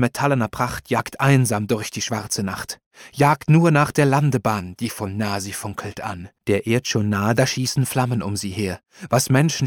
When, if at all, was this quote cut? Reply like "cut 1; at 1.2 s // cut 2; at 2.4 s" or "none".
cut 1; at 6.4 s